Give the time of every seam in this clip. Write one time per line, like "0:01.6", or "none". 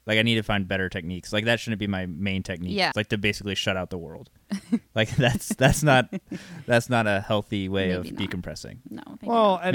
0:02.9